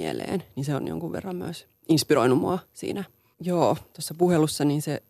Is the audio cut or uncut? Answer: cut